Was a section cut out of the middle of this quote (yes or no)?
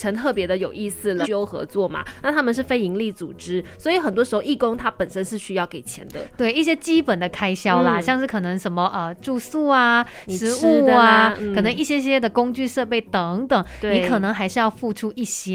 yes